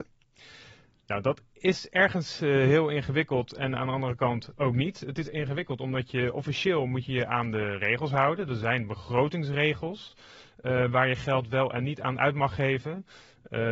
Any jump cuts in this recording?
no; 0 cuts

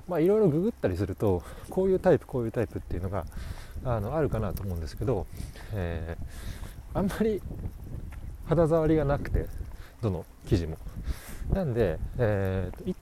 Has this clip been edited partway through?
no; 0 cuts

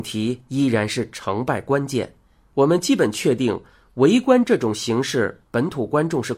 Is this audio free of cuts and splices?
no; 1 cut; at 2.5 s

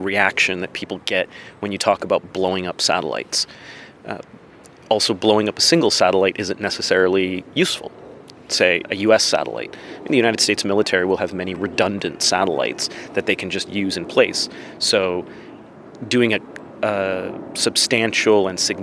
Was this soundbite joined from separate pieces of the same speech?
yes; 1 cut; at 8.8 s

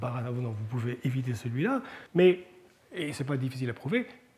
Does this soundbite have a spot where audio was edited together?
yes; 1 cut; at 2.1 s

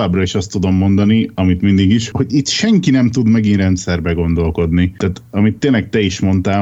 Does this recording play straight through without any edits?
no; 1 cut; at 2.1 s

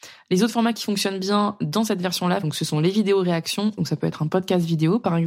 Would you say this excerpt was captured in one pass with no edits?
no; 2 cuts; at 2.4 s, 3.8 s

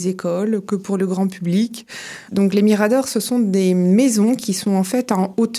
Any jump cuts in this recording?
yes; 1 cut; at 2.3 s

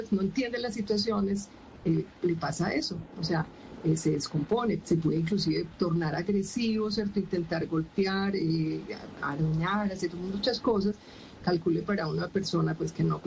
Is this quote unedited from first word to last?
no; 2 cuts; at 4.8 s, 11.4 s

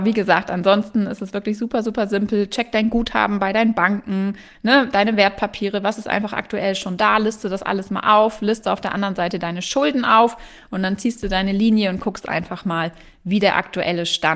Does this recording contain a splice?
no; 0 cuts

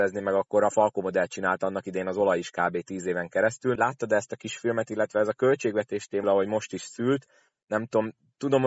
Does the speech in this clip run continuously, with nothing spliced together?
no; 2 cuts; at 3.8 s, 6.2 s

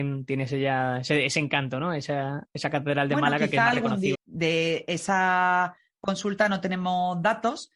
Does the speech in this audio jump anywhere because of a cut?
yes; 1 cut; at 4.1 s

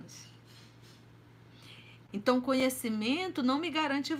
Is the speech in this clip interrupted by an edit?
yes; 1 cut; at 2.1 s

